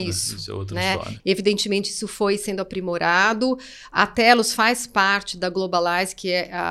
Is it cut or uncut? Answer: cut